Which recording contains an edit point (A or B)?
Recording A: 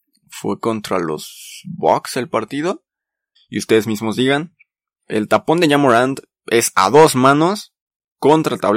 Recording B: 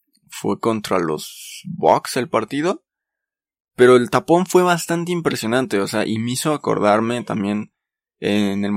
A